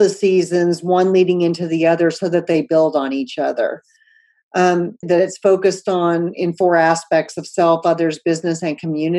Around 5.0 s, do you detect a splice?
yes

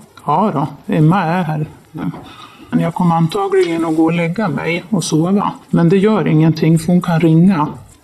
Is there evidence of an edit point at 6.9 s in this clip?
no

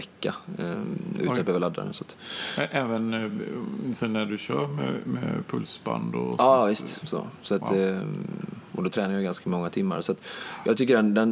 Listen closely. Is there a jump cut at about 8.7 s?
no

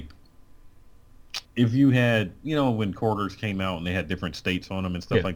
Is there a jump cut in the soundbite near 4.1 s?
no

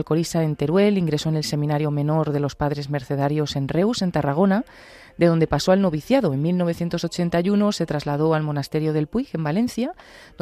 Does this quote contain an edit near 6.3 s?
no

